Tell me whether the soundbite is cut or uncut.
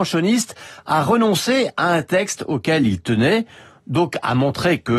uncut